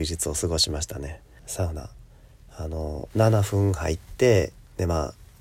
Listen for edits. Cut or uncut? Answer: cut